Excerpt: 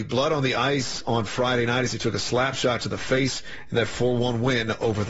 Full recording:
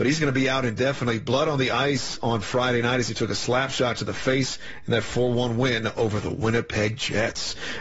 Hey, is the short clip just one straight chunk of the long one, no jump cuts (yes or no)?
yes